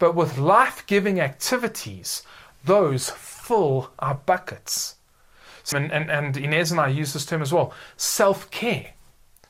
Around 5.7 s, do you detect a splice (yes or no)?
yes